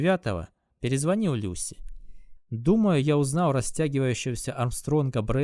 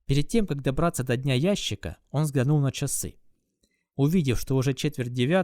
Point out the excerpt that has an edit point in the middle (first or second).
first